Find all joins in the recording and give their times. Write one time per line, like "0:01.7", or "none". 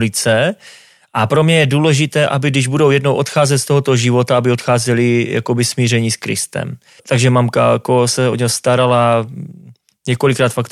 0:07.0